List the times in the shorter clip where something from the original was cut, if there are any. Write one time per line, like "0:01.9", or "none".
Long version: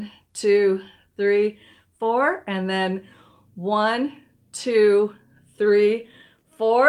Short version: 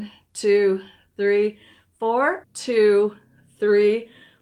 0:02.4